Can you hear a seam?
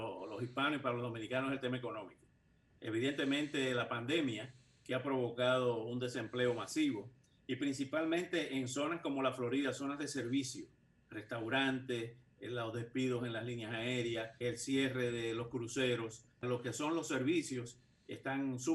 yes; 2 cuts; at 14.4 s, 16.4 s

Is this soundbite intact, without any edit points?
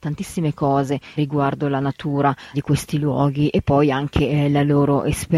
no; 2 cuts; at 1.2 s, 2.5 s

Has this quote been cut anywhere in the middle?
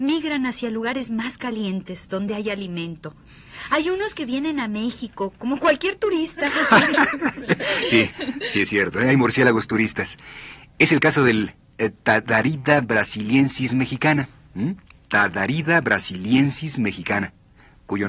no; 0 cuts

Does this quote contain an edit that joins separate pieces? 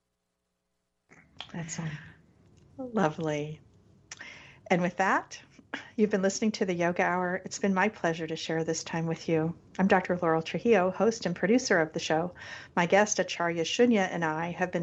no; 0 cuts

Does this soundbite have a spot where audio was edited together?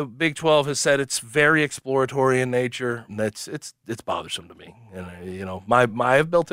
yes; 1 cut; at 3.1 s

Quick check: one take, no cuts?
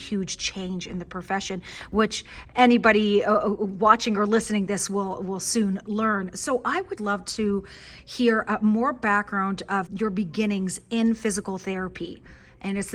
no; 2 cuts; at 7.0 s, 9.9 s

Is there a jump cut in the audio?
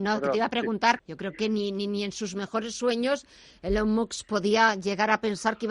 yes; 1 cut; at 1.0 s

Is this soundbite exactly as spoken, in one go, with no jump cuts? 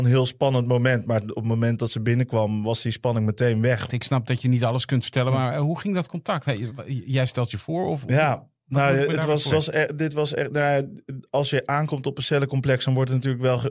no; 3 cuts; at 3.9 s, 6.7 s, 9.5 s

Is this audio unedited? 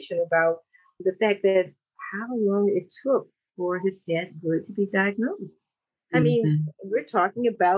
yes; 0 cuts

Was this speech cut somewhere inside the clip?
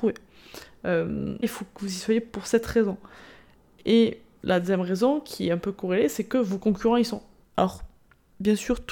yes; 2 cuts; at 1.4 s, 7.4 s

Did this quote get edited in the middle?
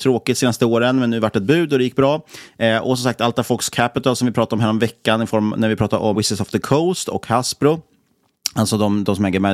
yes; 1 cut; at 6.1 s

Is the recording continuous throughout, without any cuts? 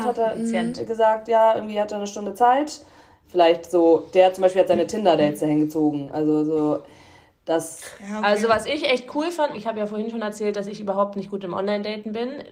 no; 2 cuts; at 3.2 s, 9.5 s

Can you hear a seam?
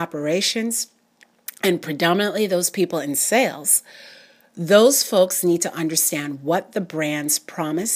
no; 0 cuts

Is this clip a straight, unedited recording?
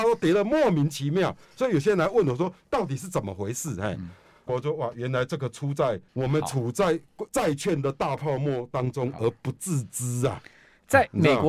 no; 3 cuts; at 4.5 s, 6.1 s, 7.3 s

